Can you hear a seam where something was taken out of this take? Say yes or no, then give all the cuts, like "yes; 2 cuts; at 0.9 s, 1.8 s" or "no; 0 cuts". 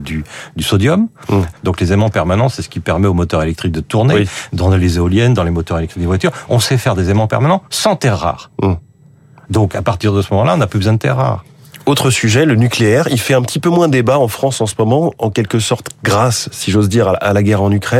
yes; 1 cut; at 1.5 s